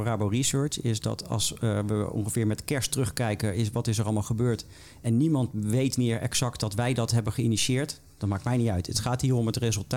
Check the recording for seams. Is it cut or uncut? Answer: uncut